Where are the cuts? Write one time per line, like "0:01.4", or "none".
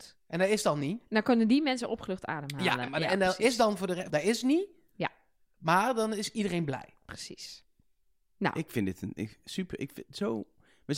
0:04.1

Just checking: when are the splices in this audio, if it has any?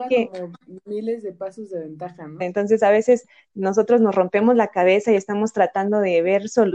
0:02.4

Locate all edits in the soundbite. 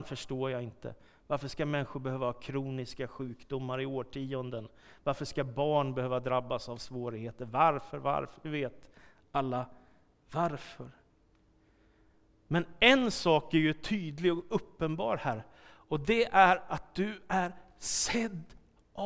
none

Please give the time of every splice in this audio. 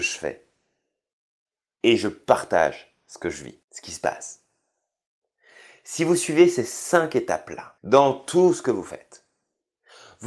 0:03.6
0:07.8

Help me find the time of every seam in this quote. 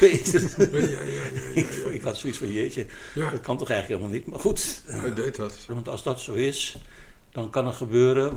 0:05.7

